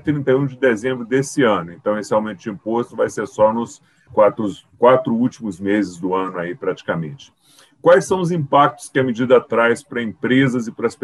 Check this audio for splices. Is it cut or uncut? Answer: cut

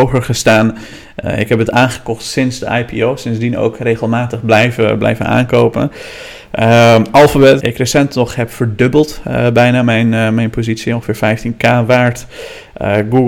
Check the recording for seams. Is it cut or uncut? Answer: cut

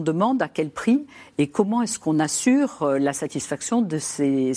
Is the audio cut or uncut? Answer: uncut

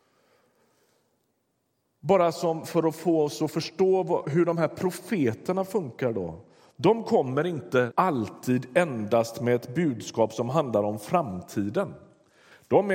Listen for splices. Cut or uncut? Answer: cut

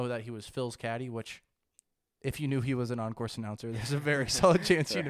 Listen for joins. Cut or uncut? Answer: uncut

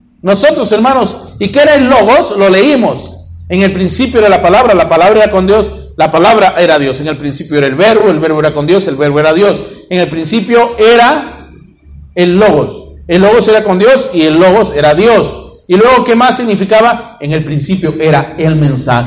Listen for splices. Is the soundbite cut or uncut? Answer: uncut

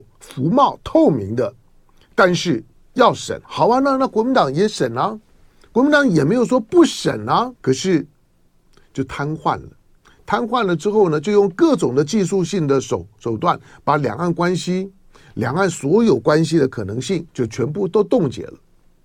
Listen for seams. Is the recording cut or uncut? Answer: cut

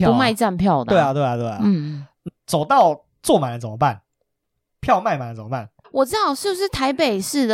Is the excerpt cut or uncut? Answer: cut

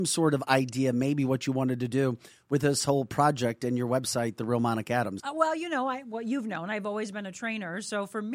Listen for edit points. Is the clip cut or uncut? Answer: cut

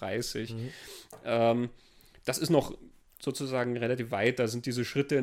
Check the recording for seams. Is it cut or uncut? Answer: uncut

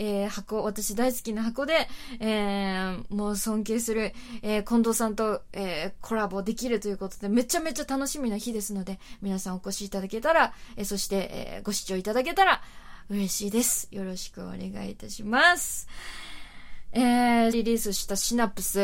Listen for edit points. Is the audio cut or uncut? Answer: cut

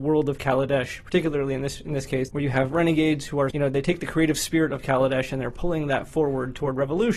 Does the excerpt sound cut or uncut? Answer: cut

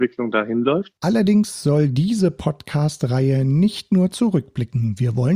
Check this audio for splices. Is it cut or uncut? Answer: cut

